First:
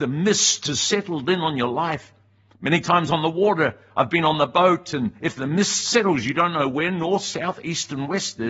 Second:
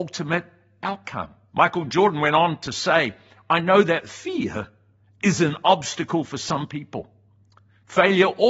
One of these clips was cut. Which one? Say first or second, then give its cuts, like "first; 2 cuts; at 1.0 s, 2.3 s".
second; 1 cut; at 1.5 s